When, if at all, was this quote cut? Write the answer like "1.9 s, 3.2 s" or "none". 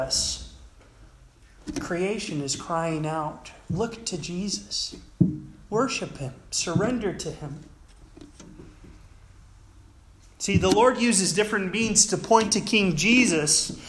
none